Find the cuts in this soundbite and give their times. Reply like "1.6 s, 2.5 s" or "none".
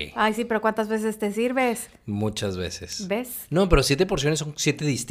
none